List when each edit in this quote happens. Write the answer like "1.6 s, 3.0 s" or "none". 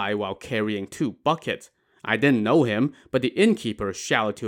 none